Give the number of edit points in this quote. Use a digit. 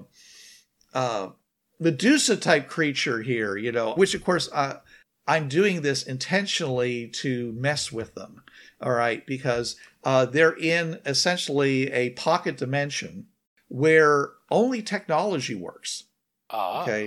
1